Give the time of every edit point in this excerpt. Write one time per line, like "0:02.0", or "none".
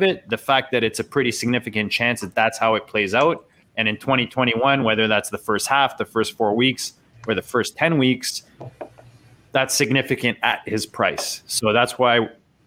none